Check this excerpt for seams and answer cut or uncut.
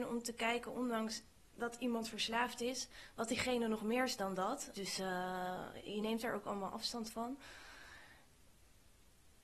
cut